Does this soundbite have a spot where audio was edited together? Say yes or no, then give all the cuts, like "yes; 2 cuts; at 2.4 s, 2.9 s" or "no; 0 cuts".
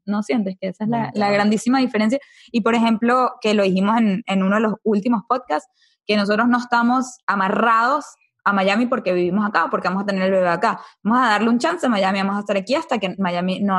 no; 0 cuts